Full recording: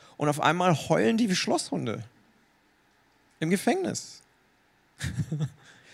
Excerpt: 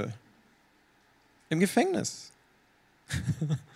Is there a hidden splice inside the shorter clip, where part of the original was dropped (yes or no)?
no